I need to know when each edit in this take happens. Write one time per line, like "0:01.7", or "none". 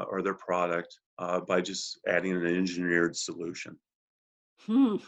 0:01.1